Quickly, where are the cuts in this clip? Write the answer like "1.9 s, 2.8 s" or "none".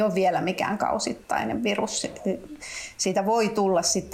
none